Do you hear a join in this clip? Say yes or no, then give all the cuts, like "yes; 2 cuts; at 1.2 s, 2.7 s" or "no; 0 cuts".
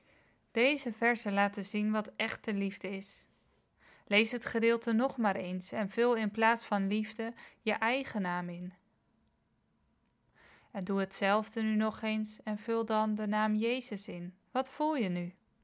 yes; 1 cut; at 14.4 s